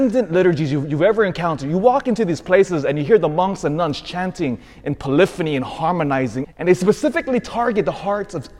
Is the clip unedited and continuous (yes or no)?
no